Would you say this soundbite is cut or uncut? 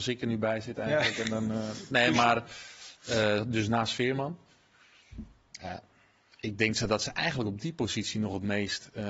uncut